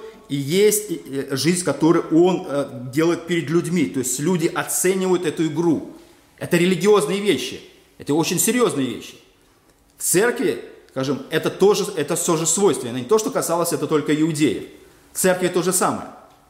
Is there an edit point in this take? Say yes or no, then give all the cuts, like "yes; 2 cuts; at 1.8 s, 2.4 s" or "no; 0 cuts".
no; 0 cuts